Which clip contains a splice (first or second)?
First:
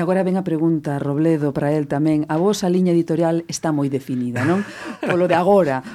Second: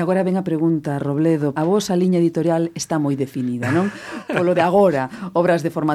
second